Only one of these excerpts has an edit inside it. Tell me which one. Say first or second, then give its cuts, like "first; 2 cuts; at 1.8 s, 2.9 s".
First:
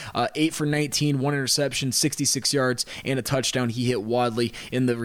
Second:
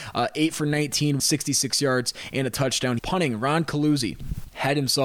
second; 2 cuts; at 1.2 s, 3.0 s